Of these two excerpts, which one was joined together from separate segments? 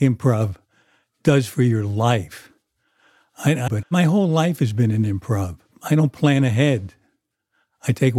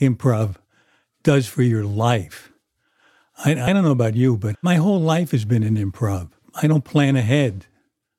first; 1 cut; at 3.7 s

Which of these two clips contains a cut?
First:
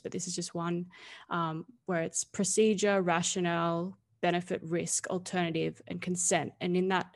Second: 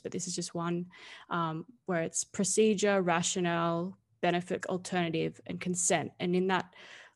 second; 1 cut; at 4.6 s

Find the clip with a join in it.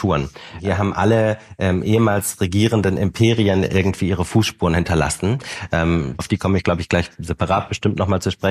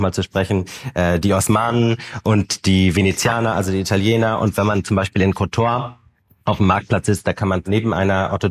first; 1 cut; at 6.2 s

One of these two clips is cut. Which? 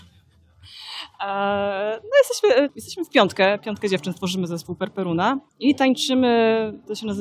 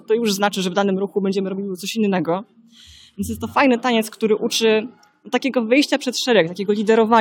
first; 2 cuts; at 2.7 s, 5.5 s

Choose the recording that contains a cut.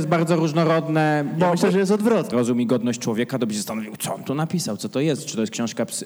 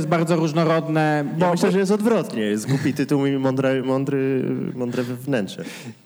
first; 1 cut; at 2.3 s

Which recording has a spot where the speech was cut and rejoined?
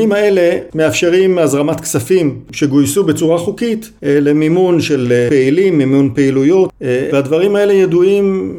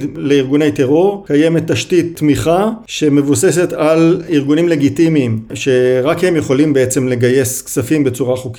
first; 1 cut; at 7.1 s

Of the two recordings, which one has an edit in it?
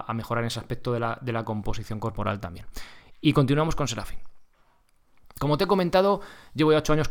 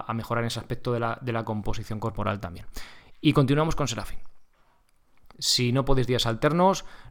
second; 1 cut; at 5.3 s

